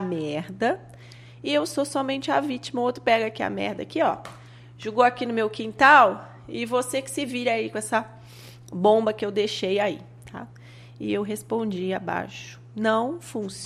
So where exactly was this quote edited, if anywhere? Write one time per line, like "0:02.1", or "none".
none

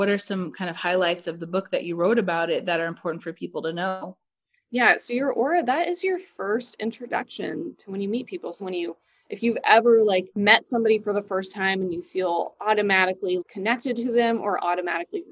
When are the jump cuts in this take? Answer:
0:08.6
0:10.3
0:13.4

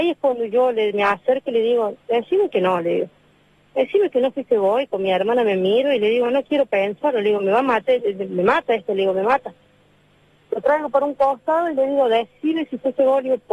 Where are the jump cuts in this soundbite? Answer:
none

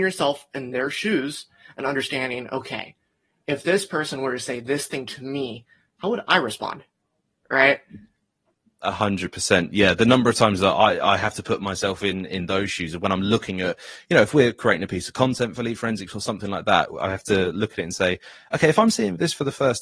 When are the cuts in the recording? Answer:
none

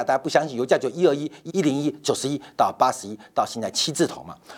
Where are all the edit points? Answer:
0:01.5

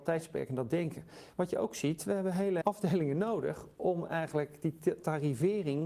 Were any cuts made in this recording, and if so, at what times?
0:01.3
0:02.6

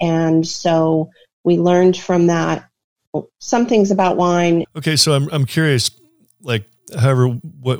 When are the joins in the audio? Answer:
0:04.6

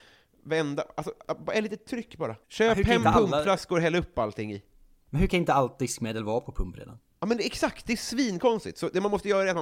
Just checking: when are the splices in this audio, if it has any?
0:02.4

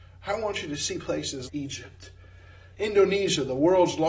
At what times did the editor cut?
0:01.5
0:02.8

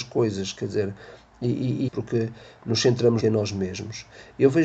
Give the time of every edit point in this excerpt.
0:01.9
0:03.2

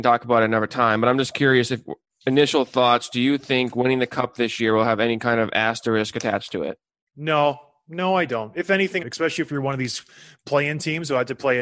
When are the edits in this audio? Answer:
0:09.0

